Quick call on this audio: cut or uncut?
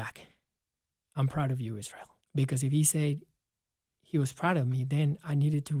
cut